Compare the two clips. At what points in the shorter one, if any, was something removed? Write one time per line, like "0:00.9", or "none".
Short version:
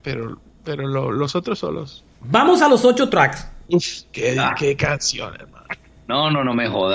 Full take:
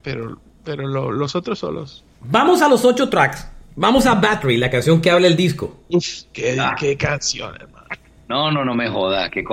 0:03.7